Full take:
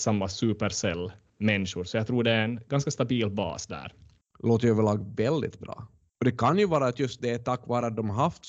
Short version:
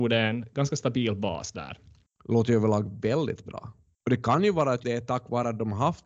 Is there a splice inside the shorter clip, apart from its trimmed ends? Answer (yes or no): yes